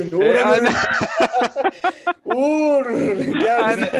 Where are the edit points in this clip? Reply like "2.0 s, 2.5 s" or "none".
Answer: none